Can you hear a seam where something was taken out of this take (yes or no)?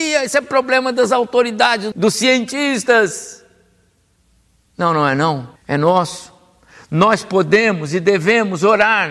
yes